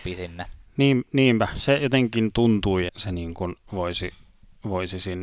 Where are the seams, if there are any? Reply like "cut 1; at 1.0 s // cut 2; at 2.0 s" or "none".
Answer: cut 1; at 2.9 s